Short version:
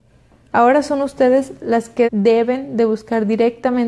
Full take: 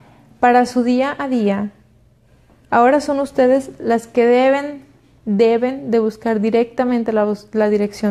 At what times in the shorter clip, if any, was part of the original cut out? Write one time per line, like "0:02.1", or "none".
0:02.0